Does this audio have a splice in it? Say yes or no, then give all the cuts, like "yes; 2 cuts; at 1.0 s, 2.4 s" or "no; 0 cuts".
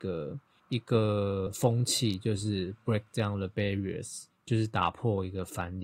no; 0 cuts